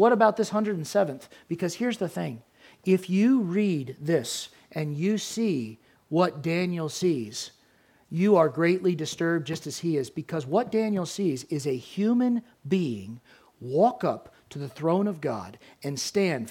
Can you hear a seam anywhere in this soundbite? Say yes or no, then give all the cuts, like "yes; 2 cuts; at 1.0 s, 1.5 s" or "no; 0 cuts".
no; 0 cuts